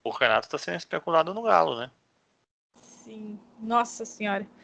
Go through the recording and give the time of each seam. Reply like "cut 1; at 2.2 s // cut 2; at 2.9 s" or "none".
none

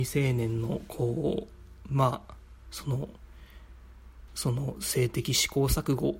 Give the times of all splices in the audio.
none

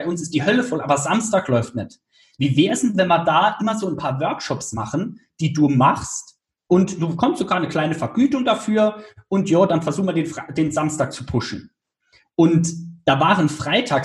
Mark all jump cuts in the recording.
none

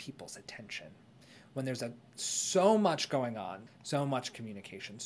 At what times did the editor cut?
cut 1; at 3.7 s

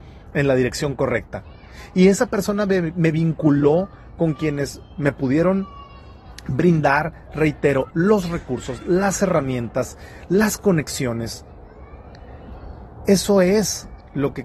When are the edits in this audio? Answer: cut 1; at 7.9 s

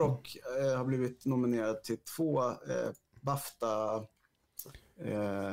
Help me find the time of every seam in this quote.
none

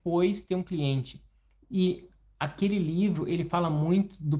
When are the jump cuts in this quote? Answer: none

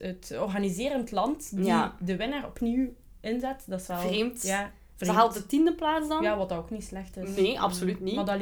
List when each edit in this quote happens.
none

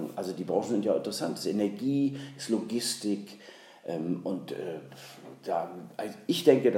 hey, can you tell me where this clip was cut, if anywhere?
none

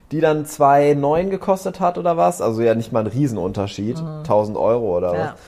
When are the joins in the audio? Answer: none

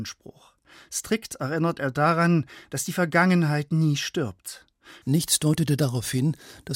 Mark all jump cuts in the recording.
cut 1; at 5.0 s

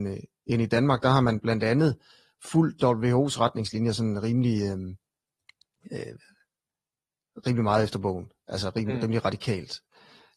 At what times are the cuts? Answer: none

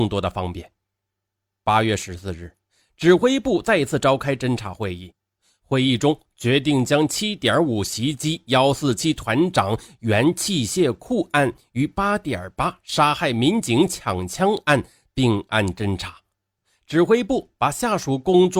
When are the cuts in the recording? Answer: none

